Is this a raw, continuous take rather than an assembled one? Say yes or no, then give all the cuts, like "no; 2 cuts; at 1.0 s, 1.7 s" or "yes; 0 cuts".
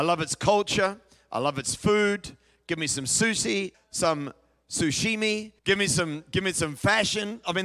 no; 2 cuts; at 3.7 s, 5.6 s